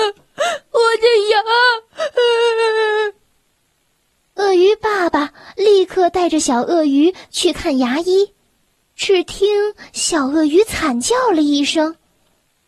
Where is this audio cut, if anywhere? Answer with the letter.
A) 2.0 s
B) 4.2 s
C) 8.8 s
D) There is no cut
C